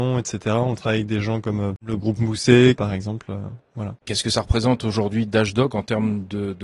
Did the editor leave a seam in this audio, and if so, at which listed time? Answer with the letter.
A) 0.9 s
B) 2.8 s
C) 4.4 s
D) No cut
B